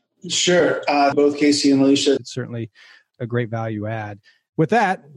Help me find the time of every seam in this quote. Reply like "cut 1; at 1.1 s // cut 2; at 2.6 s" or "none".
cut 1; at 1.1 s // cut 2; at 2.2 s